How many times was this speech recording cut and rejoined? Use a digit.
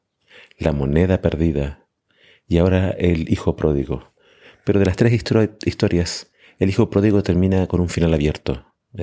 0